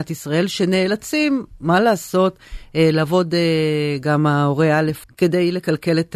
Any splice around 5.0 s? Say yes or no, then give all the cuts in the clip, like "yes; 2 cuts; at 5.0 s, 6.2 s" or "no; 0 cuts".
yes; 2 cuts; at 4.0 s, 5.0 s